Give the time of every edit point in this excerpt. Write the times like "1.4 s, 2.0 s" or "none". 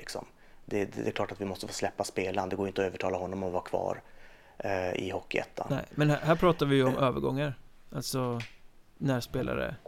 none

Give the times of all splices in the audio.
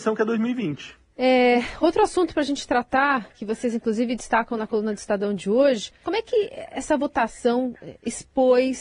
1.1 s, 6.0 s

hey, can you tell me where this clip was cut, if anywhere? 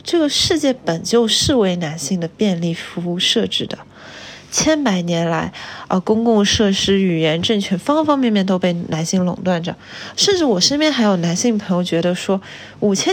none

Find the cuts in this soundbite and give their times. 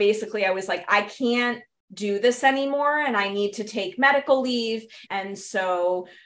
5.1 s

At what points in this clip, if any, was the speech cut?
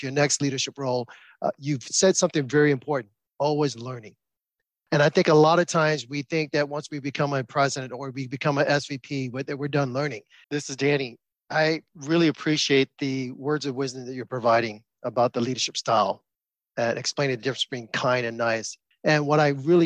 10.4 s, 18.9 s

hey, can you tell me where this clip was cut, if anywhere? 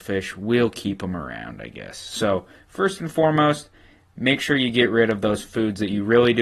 none

